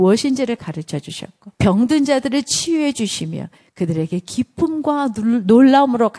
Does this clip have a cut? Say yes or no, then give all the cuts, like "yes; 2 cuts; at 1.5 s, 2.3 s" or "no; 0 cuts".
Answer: yes; 1 cut; at 1.5 s